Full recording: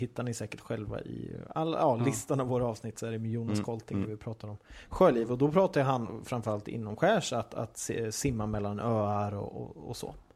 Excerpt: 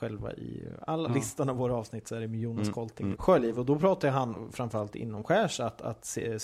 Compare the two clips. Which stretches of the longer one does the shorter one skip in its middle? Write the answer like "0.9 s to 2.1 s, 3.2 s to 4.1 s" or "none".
1.7 s to 2.0 s, 4.1 s to 4.9 s